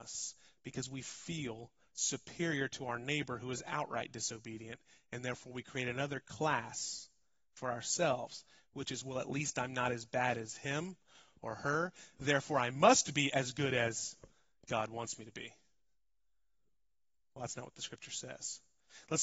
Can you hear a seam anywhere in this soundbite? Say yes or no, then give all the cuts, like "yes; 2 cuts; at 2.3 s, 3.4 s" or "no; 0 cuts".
no; 0 cuts